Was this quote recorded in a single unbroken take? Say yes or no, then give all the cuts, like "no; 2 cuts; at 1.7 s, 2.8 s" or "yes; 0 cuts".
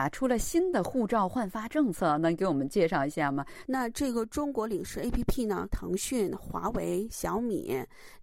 no; 2 cuts; at 3.6 s, 5.7 s